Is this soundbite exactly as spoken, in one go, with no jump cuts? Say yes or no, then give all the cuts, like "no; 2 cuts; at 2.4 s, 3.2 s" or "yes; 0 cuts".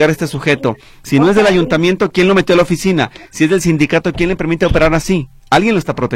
yes; 0 cuts